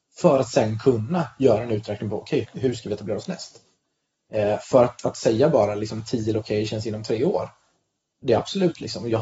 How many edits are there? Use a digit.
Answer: 1